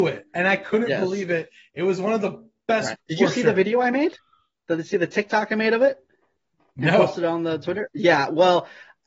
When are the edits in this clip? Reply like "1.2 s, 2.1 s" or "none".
2.9 s